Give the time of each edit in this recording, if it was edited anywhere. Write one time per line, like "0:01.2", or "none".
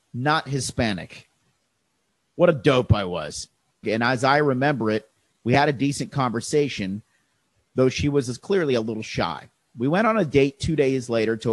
0:03.8